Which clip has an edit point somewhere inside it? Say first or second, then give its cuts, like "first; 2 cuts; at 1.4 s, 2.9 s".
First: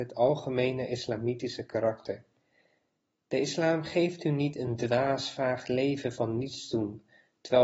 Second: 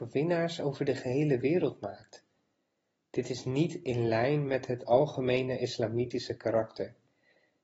second; 1 cut; at 3.0 s